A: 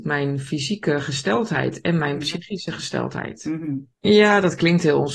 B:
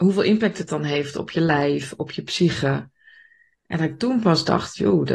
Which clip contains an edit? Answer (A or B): A